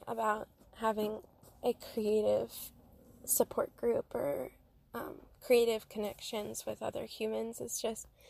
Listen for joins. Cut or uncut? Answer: uncut